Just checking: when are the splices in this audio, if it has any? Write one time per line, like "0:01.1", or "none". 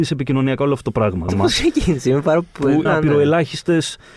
0:01.3
0:02.9